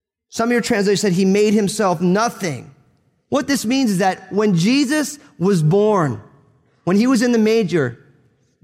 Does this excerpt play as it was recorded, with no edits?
yes; 0 cuts

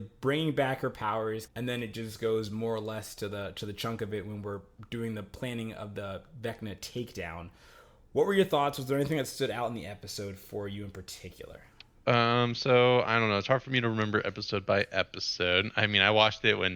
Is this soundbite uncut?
no; 1 cut; at 1.5 s

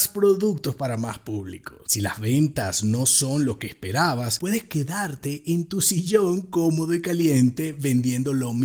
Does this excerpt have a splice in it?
yes; 1 cut; at 1.9 s

